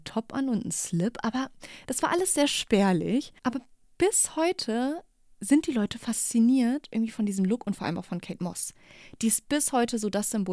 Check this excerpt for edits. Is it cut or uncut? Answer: cut